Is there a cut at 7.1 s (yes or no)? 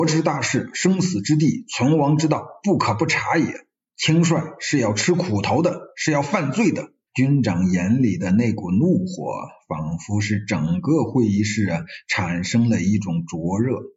yes